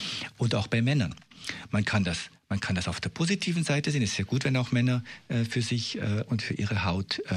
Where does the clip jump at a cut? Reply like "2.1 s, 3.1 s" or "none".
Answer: none